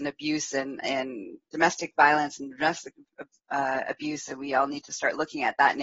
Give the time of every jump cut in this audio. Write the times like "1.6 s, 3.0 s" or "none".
none